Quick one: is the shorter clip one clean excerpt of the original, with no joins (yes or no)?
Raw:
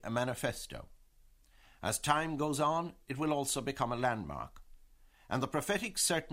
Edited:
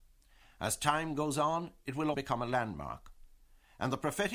no